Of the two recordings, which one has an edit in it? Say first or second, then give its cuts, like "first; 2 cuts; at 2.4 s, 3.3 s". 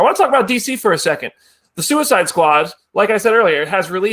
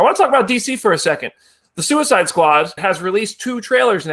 second; 1 cut; at 2.8 s